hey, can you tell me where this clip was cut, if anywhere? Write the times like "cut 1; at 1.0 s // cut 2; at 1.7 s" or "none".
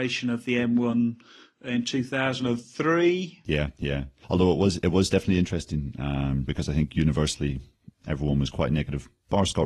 cut 1; at 6.5 s